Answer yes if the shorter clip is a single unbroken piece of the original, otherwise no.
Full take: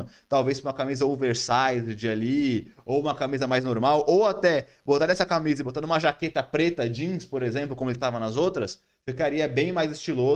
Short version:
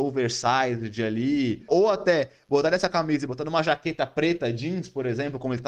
no